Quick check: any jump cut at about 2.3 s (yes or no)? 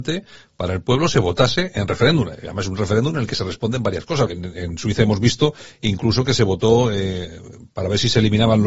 no